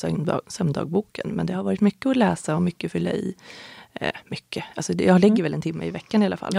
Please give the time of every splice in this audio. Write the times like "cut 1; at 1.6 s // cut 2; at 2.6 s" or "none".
none